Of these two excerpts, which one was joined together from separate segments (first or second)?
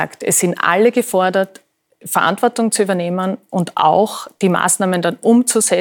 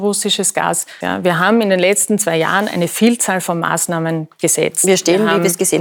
second